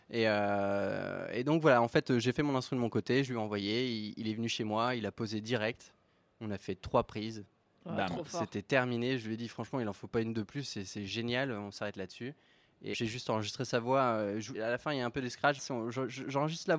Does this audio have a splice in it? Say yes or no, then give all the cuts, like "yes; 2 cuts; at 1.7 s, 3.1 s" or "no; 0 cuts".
yes; 3 cuts; at 12.9 s, 14.5 s, 15.6 s